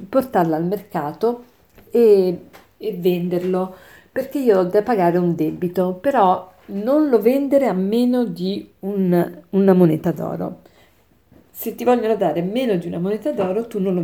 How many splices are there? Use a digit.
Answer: 0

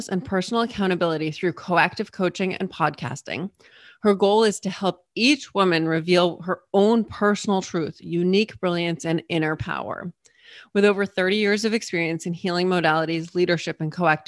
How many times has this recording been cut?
0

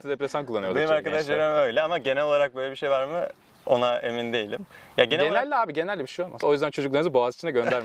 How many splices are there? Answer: 1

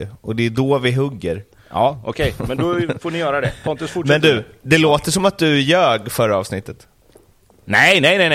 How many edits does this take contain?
0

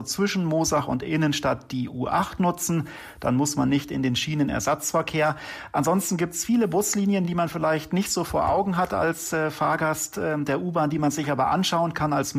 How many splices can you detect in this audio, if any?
0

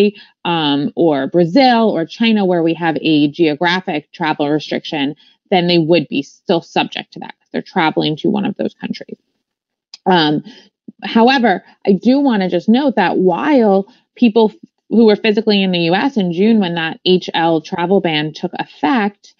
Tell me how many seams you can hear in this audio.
0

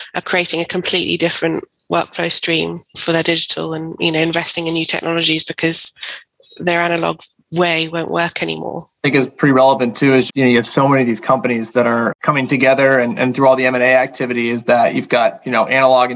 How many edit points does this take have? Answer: 1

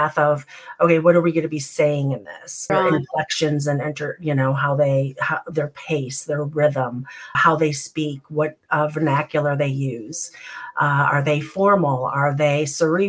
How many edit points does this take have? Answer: 2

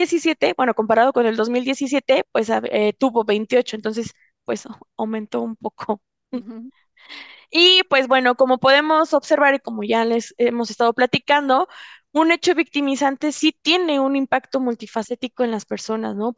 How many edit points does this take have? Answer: 0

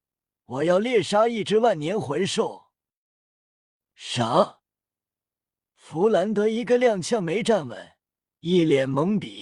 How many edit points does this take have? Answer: 1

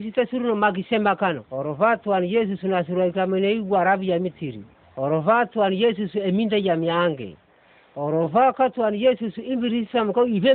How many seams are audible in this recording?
1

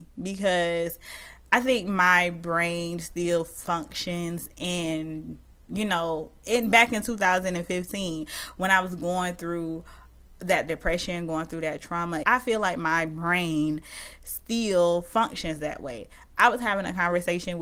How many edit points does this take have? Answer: 1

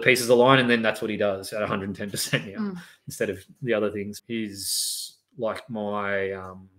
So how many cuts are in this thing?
1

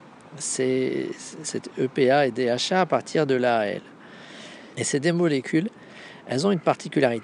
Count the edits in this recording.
2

